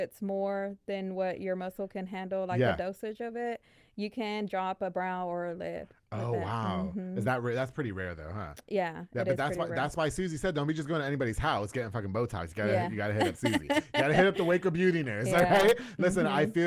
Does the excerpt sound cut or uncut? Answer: uncut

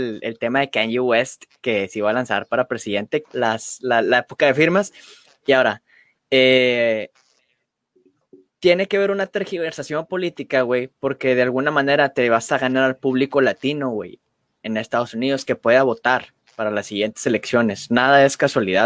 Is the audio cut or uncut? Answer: cut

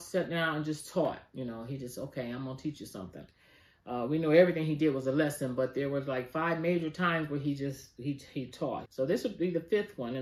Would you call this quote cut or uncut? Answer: cut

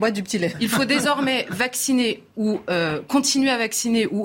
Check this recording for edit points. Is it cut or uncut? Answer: uncut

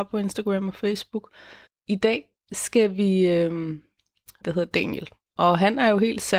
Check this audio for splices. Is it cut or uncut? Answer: cut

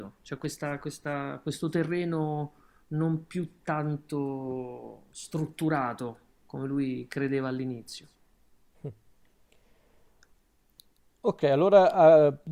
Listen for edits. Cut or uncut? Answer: uncut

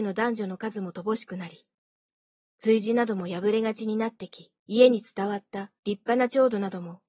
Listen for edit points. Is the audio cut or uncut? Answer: cut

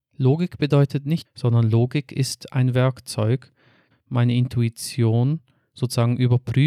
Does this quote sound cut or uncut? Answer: cut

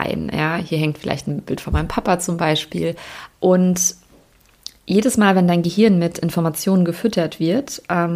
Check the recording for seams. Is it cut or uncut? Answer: cut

